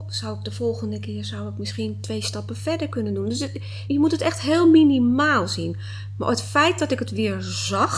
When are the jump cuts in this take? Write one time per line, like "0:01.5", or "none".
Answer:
0:03.9